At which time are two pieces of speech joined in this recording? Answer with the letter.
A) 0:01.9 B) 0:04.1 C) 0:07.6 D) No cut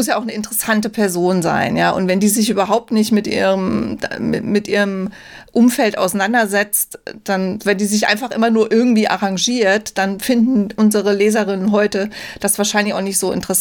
C